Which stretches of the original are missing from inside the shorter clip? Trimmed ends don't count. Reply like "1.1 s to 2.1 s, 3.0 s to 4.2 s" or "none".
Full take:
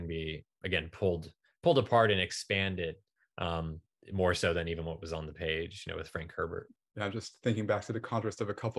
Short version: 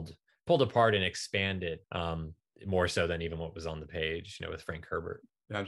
3.0 s to 3.3 s